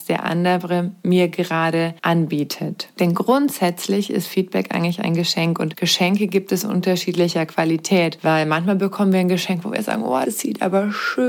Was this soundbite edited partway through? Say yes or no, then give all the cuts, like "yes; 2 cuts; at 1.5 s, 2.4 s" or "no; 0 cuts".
yes; 2 cuts; at 2.0 s, 10.2 s